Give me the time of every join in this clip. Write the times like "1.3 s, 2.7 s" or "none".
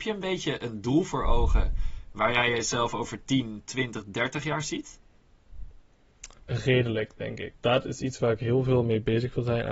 6.4 s, 7.5 s